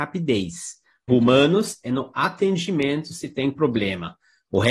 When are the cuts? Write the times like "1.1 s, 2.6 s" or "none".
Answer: 1.1 s